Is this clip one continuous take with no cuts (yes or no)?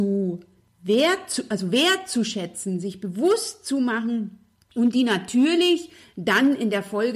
yes